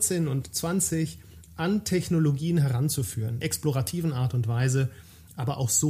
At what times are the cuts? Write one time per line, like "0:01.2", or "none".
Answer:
0:03.4